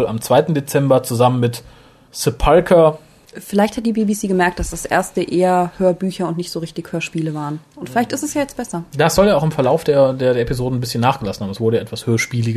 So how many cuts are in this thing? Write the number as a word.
zero